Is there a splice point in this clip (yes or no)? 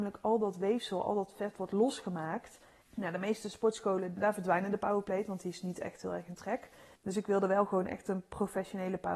yes